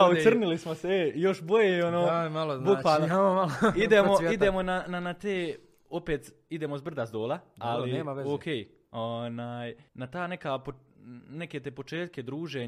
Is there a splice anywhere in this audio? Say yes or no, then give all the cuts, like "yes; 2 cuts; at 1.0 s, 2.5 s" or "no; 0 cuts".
yes; 1 cut; at 9.9 s